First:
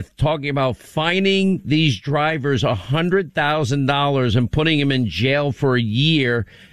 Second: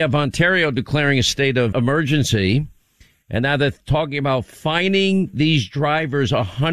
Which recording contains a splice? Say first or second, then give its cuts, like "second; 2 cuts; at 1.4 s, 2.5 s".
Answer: second; 1 cut; at 1.7 s